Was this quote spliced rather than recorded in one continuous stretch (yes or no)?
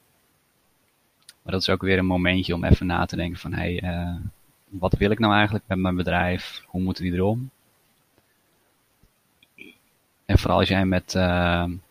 yes